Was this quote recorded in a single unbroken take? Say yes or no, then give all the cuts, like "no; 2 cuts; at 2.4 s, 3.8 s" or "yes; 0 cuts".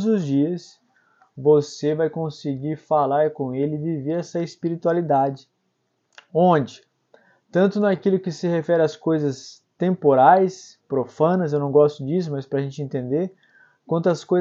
yes; 0 cuts